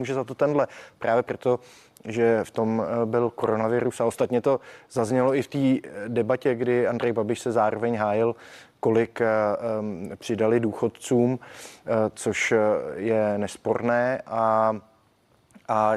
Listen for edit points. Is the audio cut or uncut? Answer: uncut